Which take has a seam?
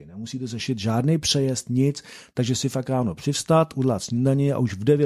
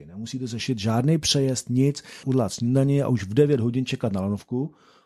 second; 1 cut; at 2.2 s

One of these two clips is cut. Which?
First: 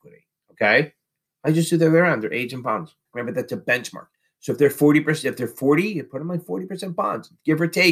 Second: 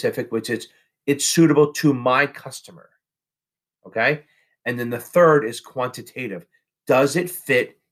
first; 1 cut; at 3.1 s

